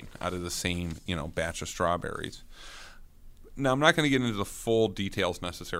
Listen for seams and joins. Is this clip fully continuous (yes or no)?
yes